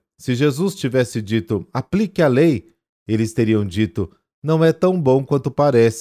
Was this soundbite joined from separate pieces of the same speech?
no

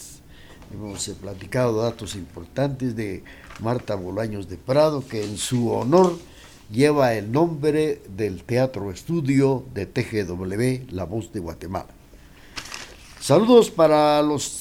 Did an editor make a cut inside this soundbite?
no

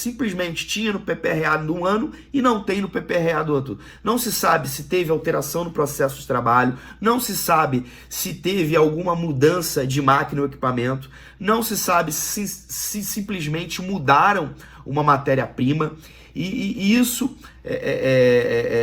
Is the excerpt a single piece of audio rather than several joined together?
yes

